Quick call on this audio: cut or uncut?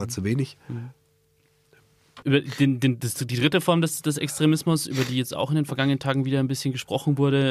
cut